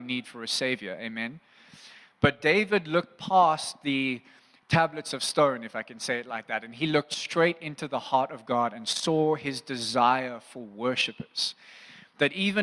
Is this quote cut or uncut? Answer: uncut